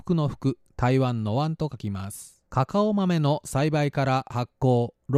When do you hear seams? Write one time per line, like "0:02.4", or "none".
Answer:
0:02.5